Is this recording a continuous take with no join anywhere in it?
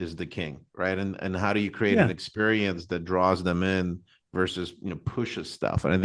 yes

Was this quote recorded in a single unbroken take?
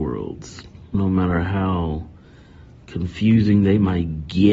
no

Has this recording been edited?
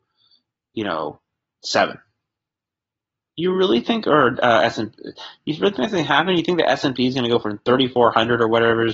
no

